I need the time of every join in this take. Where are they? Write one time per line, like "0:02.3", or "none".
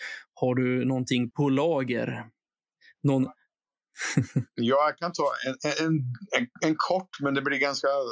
0:01.3